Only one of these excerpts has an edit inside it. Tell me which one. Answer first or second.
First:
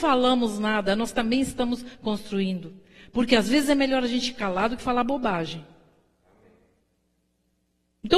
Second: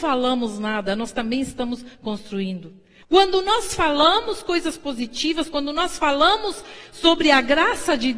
second